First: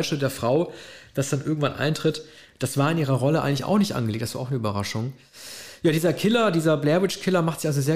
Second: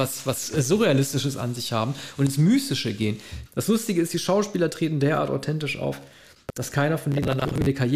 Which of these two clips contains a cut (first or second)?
second